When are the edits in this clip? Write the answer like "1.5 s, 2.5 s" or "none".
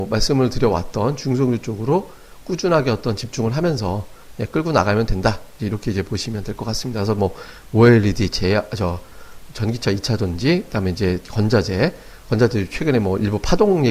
none

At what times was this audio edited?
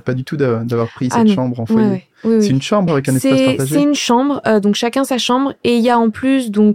2.9 s

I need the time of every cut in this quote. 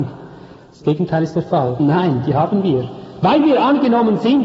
1.8 s

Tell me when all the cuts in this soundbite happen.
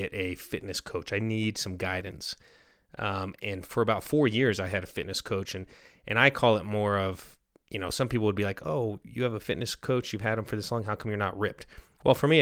none

